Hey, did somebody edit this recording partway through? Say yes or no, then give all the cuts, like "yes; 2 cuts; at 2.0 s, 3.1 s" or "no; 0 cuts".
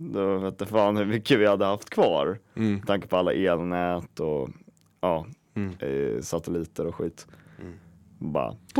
no; 0 cuts